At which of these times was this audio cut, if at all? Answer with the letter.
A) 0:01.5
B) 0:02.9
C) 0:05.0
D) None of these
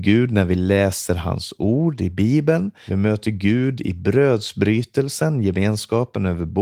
B